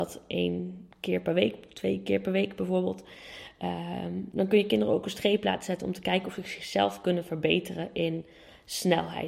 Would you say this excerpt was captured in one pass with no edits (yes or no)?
yes